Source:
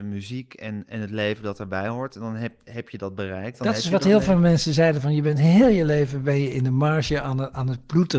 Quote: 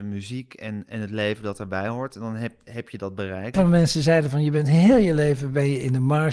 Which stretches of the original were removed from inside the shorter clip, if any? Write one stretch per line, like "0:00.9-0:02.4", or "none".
0:03.5-0:04.2